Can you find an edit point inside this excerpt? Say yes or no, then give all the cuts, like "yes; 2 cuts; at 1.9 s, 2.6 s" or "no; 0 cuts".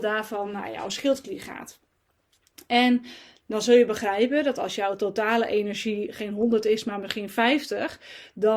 no; 0 cuts